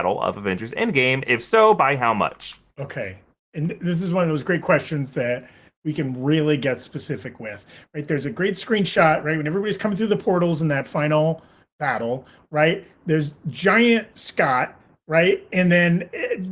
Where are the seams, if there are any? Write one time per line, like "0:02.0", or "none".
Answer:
none